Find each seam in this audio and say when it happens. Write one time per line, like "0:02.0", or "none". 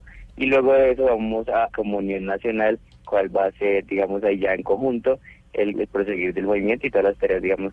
0:01.7
0:05.7